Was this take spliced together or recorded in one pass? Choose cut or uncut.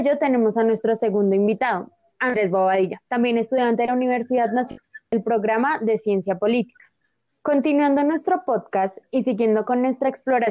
cut